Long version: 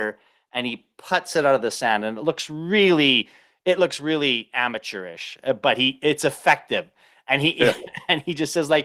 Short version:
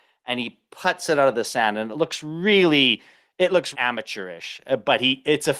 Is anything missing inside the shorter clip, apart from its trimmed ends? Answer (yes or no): yes